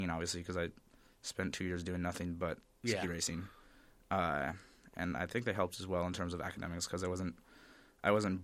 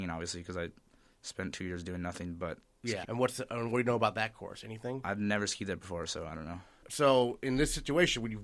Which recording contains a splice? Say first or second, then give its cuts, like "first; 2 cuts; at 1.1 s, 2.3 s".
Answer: second; 1 cut; at 3.0 s